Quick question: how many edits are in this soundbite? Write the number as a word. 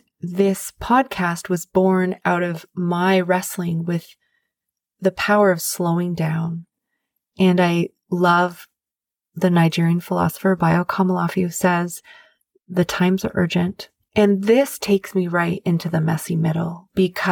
one